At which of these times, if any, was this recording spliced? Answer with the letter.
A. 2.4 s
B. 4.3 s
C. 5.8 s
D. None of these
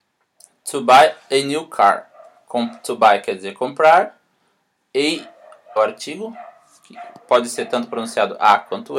C